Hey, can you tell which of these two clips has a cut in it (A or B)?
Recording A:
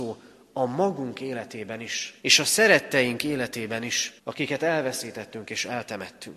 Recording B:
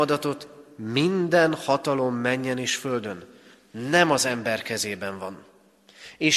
A